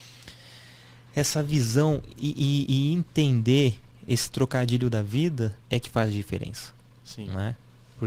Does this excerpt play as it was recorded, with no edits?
no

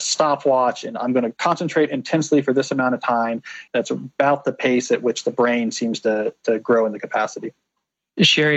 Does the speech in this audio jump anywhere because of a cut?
yes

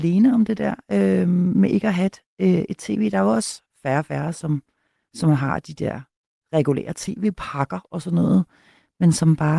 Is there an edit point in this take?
no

